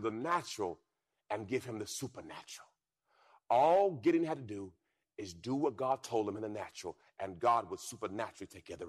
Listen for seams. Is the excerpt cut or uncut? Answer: uncut